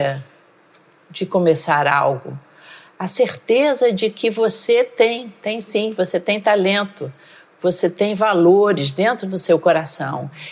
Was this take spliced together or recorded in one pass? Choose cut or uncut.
uncut